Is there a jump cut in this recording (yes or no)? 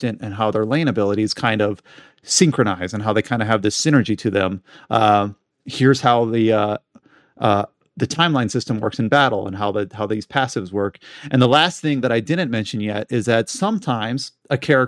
no